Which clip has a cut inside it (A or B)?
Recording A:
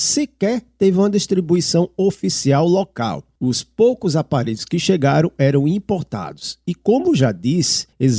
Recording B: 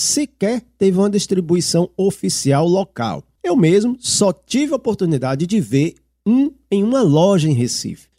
B